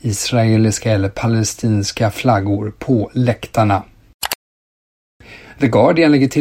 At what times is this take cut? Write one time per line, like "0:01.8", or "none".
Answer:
none